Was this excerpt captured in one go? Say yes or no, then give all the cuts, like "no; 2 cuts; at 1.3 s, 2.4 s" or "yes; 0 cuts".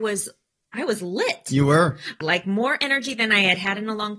no; 1 cut; at 2.2 s